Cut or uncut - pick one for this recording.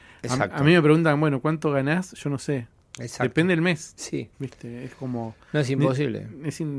cut